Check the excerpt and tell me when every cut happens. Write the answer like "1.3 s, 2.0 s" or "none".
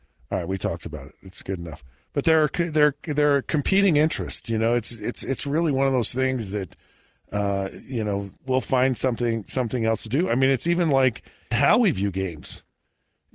8.4 s, 11.5 s